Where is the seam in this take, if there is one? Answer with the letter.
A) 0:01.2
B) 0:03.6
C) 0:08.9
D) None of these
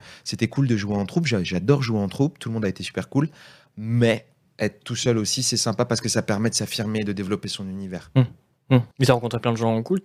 C